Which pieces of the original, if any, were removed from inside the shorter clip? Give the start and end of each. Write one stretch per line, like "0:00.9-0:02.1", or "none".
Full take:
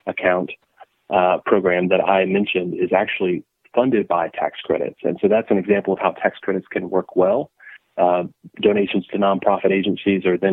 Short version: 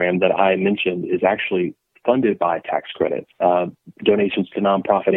0:05.0-0:07.9